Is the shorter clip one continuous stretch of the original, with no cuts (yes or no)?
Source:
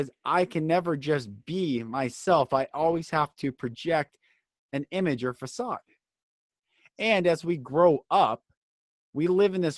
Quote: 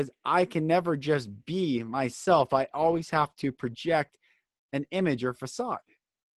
yes